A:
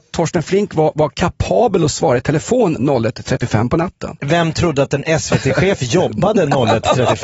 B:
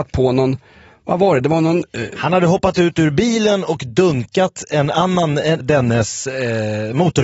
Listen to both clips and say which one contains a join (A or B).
B